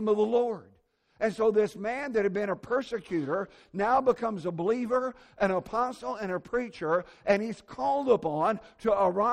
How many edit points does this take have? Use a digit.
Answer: 0